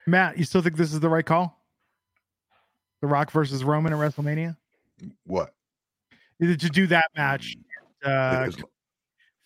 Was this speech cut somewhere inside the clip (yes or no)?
no